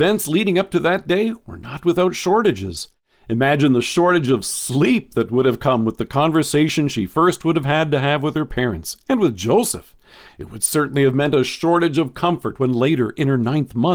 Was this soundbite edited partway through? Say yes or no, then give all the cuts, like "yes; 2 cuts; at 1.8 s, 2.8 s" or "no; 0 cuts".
no; 0 cuts